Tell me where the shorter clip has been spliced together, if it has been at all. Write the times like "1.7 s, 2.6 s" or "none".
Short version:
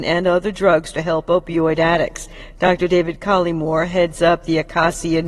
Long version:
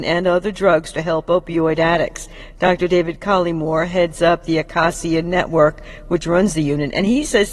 none